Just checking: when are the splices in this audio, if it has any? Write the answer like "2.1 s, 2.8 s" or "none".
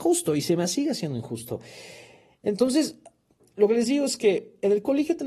none